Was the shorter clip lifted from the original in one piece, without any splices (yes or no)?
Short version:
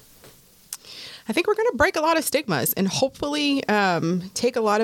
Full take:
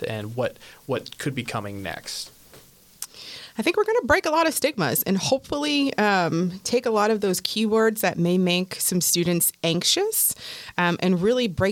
yes